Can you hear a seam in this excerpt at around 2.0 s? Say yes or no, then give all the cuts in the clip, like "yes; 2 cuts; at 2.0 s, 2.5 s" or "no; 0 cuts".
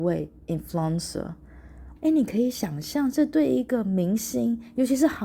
yes; 1 cut; at 2.0 s